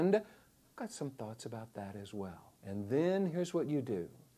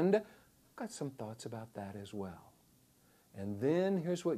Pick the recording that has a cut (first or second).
first